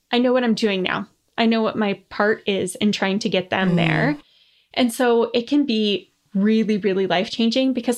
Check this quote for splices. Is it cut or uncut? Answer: uncut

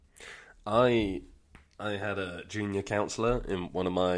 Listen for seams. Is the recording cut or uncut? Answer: uncut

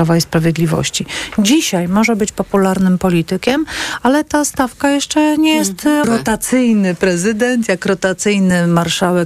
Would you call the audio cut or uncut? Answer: cut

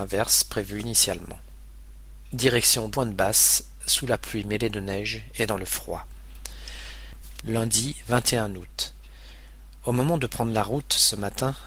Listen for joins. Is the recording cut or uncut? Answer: cut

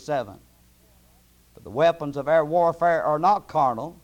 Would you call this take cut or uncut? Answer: cut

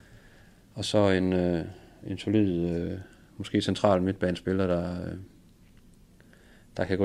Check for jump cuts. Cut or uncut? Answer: uncut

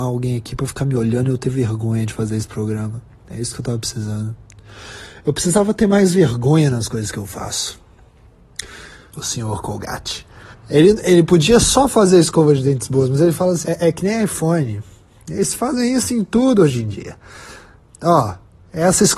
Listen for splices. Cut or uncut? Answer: cut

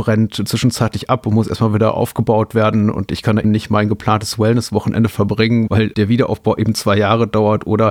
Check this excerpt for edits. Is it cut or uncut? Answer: cut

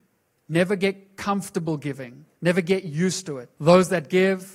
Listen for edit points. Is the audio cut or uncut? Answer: cut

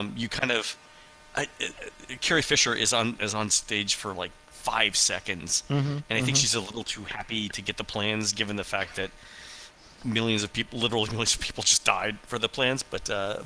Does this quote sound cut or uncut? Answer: uncut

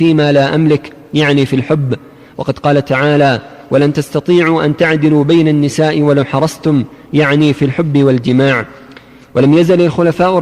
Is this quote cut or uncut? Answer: uncut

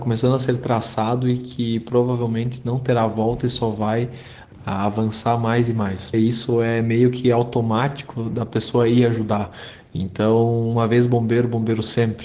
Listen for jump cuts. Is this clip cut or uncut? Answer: cut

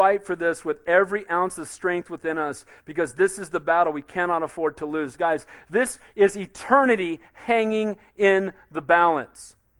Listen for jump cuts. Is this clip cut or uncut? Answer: uncut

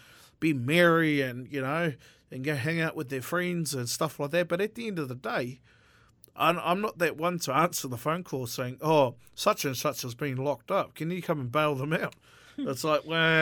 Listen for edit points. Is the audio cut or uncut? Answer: uncut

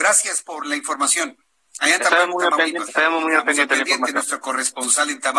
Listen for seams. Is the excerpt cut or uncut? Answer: cut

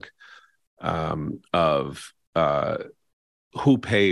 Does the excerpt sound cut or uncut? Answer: uncut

